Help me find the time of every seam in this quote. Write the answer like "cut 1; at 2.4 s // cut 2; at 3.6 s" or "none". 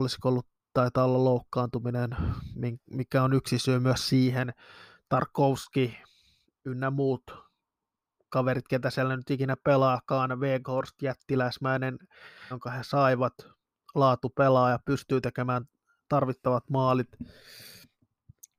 cut 1; at 12.5 s